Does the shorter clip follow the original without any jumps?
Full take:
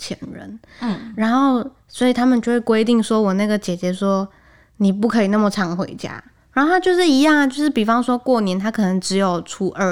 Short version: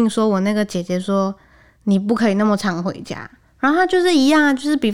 yes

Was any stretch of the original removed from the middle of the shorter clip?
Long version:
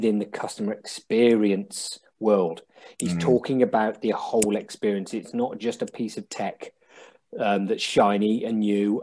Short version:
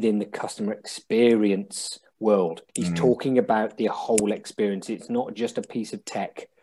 yes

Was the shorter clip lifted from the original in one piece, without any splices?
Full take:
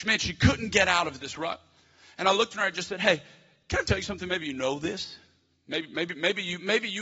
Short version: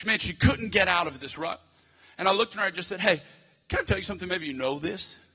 yes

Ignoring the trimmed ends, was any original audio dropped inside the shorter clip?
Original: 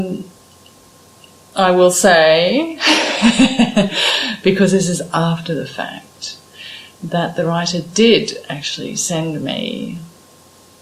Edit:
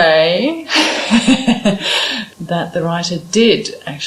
yes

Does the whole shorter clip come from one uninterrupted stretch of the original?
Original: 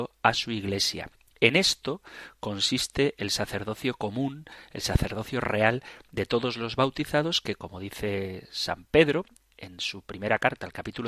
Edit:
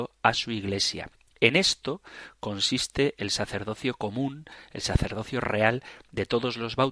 yes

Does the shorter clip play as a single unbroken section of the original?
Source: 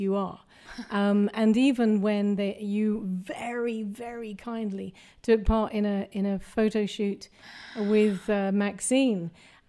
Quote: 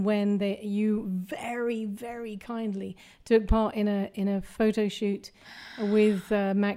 yes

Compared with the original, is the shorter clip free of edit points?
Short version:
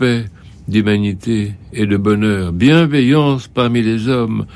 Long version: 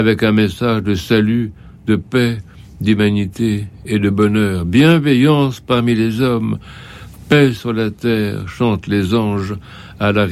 yes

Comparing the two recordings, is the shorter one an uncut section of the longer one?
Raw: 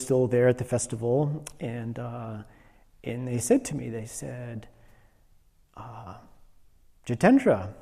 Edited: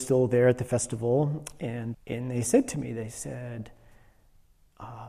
no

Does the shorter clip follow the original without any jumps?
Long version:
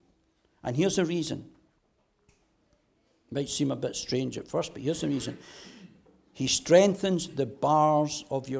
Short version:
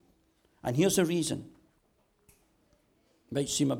yes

